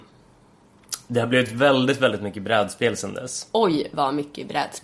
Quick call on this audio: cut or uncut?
uncut